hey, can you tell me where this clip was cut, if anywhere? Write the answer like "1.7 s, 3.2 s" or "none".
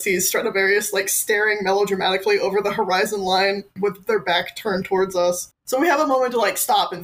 none